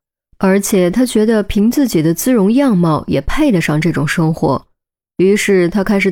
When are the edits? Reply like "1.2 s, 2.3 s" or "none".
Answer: none

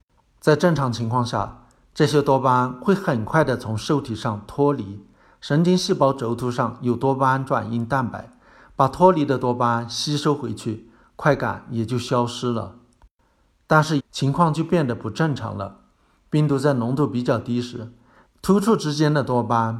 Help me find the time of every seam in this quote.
14.0 s, 18.3 s

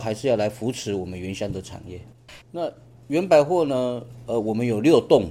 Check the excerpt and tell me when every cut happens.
2.4 s

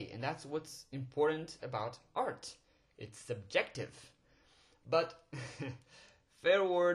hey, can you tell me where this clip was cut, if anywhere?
none

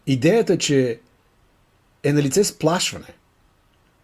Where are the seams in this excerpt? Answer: none

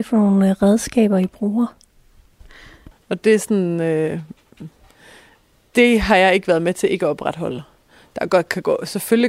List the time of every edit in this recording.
2.9 s

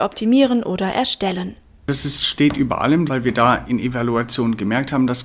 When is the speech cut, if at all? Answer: 3.1 s

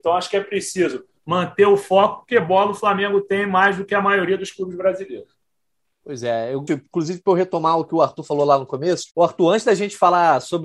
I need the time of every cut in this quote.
6.7 s, 9.1 s

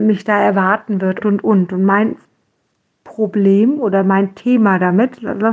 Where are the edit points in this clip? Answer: 1.2 s

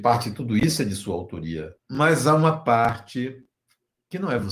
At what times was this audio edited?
1.8 s

